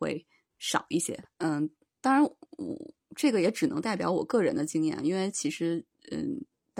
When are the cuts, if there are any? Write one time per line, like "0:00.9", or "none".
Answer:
0:01.2